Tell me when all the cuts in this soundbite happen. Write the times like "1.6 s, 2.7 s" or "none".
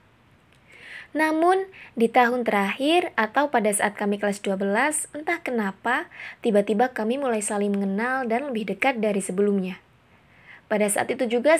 none